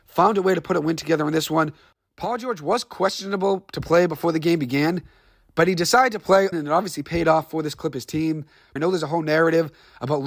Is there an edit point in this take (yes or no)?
yes